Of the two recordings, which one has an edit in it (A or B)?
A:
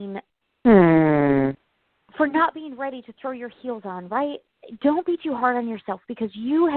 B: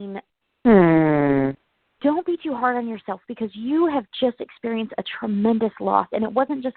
B